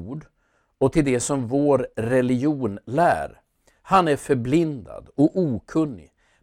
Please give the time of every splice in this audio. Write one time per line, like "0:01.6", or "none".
none